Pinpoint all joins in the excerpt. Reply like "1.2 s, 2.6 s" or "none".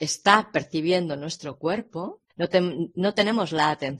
2.3 s